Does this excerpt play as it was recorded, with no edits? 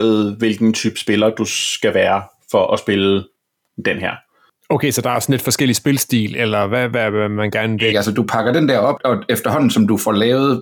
no; 2 cuts; at 7.9 s, 9.0 s

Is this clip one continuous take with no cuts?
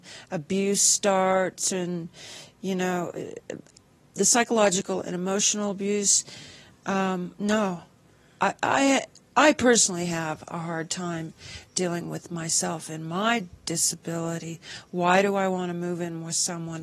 yes; 0 cuts

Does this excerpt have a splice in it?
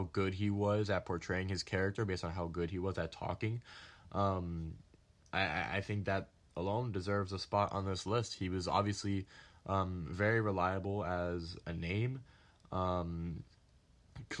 no; 0 cuts

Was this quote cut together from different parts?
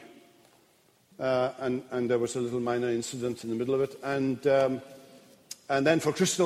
yes; 1 cut; at 1.1 s

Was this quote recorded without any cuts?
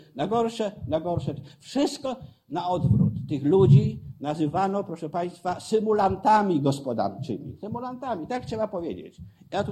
yes; 0 cuts

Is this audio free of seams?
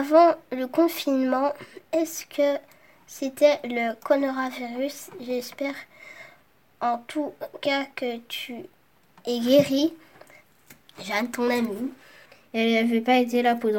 yes; 0 cuts

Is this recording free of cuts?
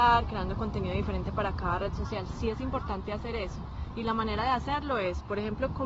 yes; 0 cuts

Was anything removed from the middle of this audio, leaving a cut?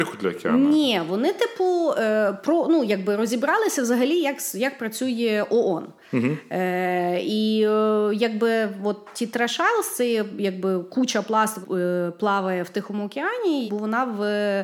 yes; 2 cuts; at 11.6 s, 13.7 s

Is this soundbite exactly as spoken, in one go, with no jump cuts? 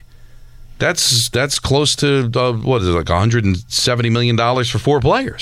yes; 0 cuts

